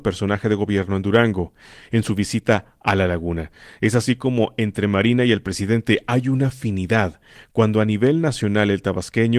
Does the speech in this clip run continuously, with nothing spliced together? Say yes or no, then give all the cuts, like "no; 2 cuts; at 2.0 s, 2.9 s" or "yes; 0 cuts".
yes; 0 cuts